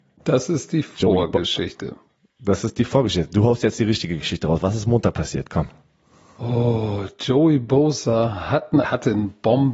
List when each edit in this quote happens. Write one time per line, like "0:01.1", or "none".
0:08.8

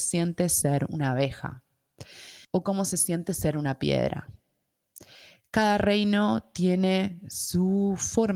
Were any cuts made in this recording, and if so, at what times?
0:02.4

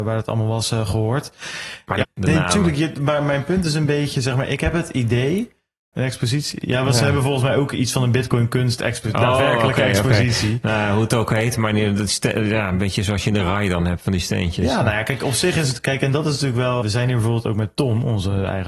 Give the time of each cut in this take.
0:02.0
0:05.9
0:16.8

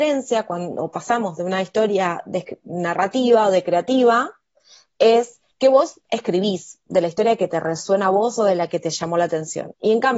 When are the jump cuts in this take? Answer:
0:05.5

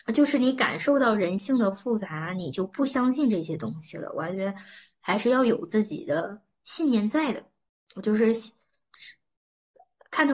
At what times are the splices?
none

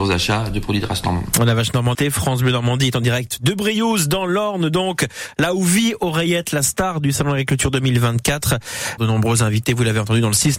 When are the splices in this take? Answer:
0:01.9
0:09.0

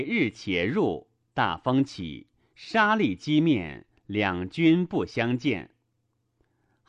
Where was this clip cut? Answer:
none

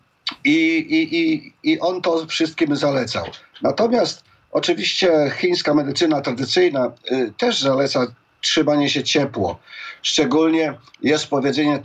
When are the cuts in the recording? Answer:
none

